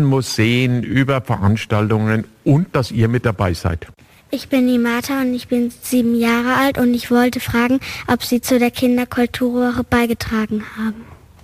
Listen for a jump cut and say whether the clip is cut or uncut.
uncut